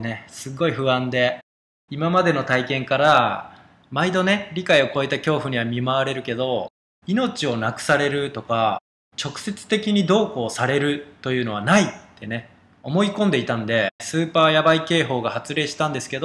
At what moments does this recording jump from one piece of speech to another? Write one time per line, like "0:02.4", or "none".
0:14.0